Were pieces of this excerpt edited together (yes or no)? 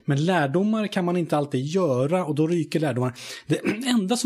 no